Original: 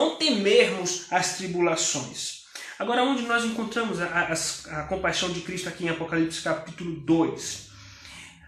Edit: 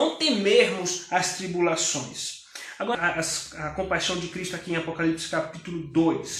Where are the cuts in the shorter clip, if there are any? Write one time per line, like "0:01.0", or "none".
0:02.9